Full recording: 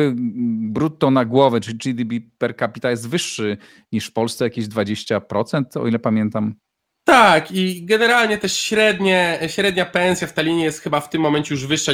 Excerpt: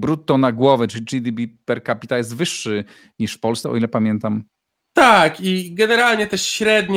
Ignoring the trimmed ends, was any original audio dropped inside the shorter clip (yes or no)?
yes